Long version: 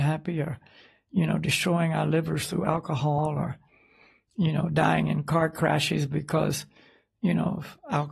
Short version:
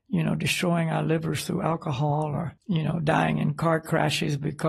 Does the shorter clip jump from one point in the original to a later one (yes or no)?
yes